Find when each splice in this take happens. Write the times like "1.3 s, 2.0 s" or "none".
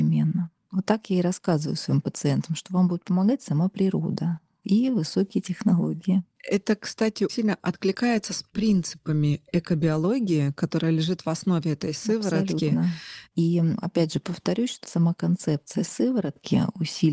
7.3 s, 13.3 s, 14.8 s